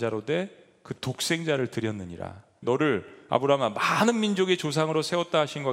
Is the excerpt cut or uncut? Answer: cut